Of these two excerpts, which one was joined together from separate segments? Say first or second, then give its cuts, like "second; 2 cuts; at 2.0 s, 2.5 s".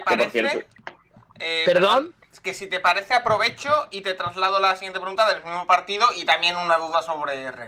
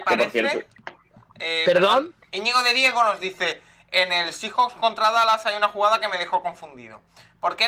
second; 1 cut; at 2.3 s